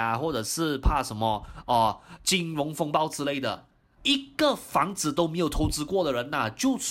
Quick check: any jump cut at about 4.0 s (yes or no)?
yes